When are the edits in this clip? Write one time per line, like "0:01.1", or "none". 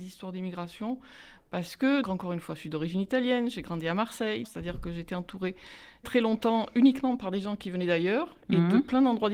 0:02.0
0:04.4
0:06.0